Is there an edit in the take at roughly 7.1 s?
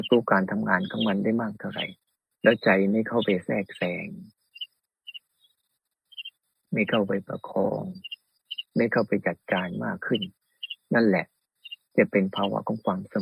no; 0 cuts

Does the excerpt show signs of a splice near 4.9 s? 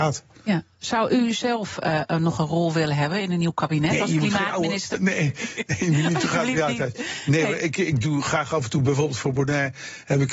yes; 1 cut; at 4.9 s

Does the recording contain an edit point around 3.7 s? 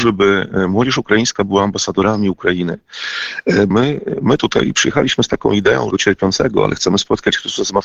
yes; 2 cuts; at 3.7 s, 5.9 s

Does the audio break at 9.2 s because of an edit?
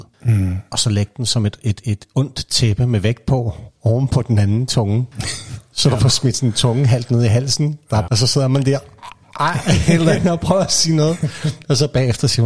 yes; 2 cuts; at 8.1 s, 9.2 s

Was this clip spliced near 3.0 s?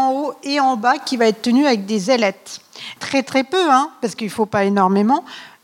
yes; 1 cut; at 3.0 s

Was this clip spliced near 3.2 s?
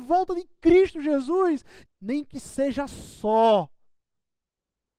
no; 1 cut; at 1.8 s

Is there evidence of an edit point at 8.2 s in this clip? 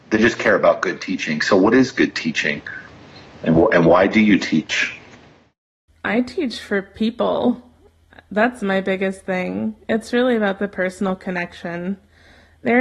no; 1 cut; at 5.9 s

